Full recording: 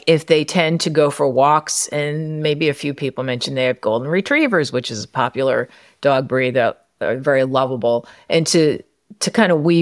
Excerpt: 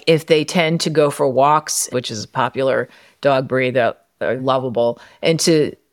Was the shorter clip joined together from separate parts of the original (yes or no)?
yes